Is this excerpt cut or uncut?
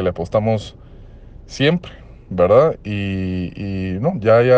uncut